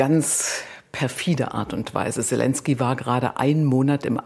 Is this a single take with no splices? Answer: yes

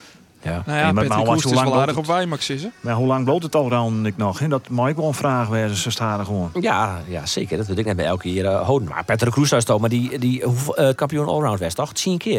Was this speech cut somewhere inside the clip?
yes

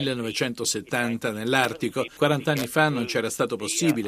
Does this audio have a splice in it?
yes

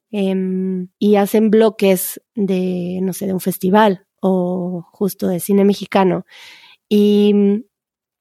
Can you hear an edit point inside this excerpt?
yes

